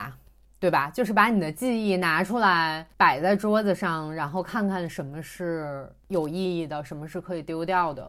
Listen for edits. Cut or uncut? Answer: uncut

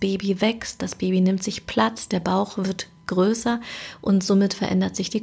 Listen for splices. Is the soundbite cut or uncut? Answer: uncut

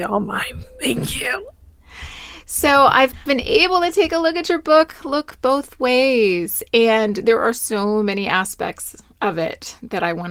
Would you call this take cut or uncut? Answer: uncut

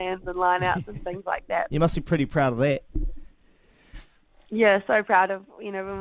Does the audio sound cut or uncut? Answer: cut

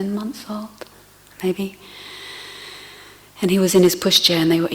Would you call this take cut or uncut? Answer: uncut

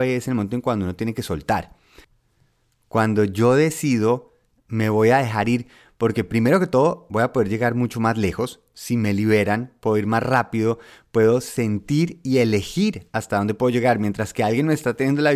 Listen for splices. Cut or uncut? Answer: cut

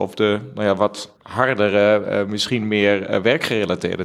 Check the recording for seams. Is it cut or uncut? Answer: cut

